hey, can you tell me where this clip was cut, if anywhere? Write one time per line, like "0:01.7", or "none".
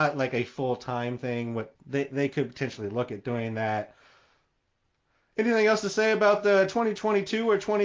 0:01.7